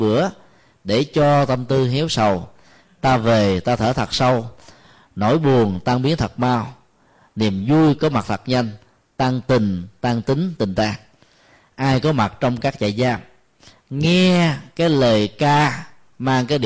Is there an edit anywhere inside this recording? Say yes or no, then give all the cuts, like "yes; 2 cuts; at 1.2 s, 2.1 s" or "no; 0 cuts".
no; 0 cuts